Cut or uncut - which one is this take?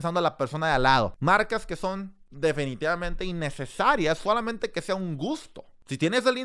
cut